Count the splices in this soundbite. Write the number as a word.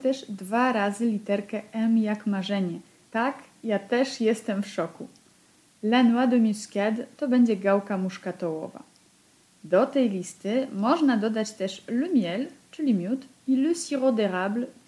one